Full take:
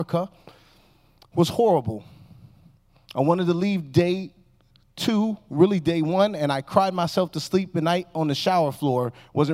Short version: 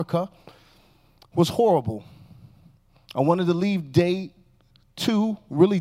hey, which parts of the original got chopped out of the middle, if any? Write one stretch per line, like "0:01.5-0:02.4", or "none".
none

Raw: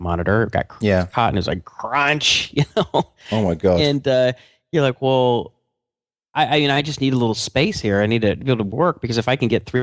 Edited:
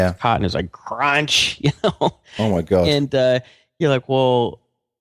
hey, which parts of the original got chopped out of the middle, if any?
none

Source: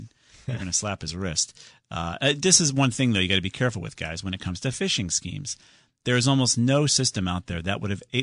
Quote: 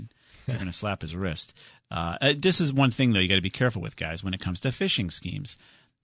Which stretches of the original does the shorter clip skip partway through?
none

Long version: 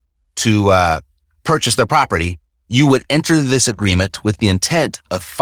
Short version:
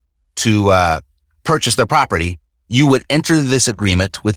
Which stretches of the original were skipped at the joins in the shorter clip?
none

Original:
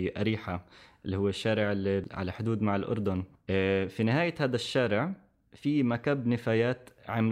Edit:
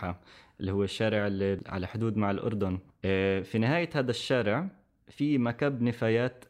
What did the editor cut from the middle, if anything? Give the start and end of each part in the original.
none

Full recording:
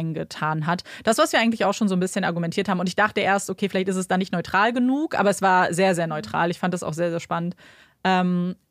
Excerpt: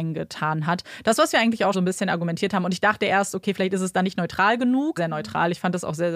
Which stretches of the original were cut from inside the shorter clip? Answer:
0:01.7-0:01.9
0:05.1-0:06.0

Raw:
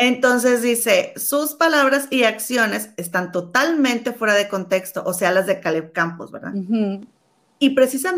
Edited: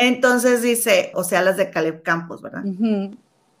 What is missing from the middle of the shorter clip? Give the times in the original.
0:01.1-0:05.0

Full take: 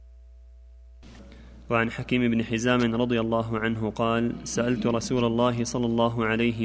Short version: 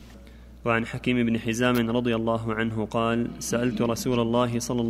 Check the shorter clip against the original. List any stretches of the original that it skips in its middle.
none

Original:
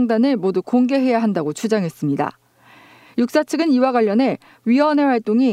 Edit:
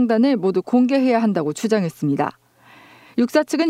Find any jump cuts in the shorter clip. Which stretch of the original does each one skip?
none

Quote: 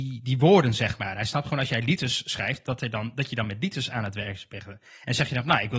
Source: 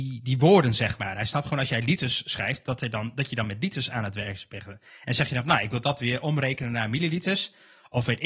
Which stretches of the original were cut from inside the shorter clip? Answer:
none

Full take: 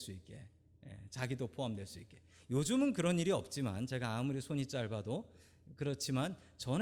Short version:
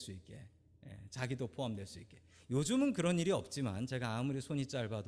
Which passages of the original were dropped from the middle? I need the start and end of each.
none

